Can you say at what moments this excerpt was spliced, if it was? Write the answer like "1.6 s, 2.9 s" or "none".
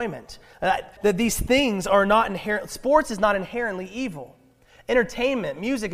1.0 s